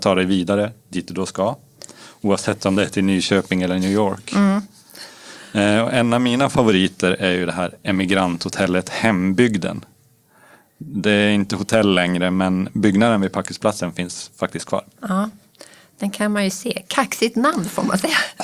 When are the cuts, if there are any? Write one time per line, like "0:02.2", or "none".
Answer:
none